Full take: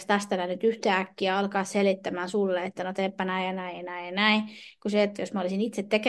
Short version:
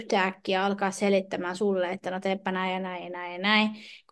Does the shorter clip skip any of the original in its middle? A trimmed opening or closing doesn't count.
no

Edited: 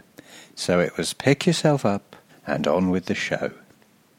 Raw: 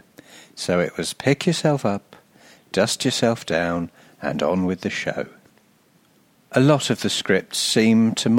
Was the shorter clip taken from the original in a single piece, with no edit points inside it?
no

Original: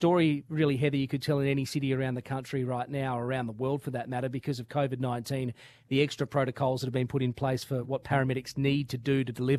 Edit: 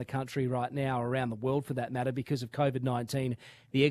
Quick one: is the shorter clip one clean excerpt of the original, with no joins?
yes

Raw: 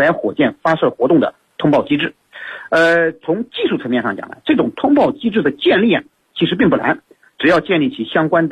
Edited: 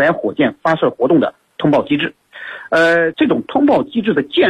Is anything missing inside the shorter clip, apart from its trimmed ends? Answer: yes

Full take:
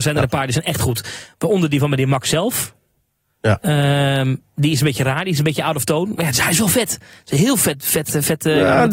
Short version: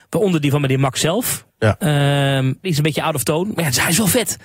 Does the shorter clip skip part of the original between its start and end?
yes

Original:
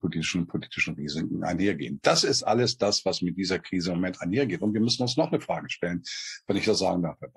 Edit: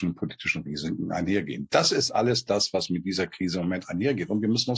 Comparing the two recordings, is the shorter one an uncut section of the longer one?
yes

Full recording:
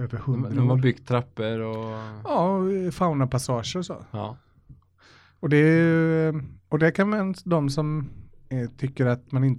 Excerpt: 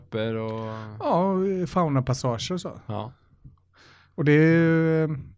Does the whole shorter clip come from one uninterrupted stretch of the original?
yes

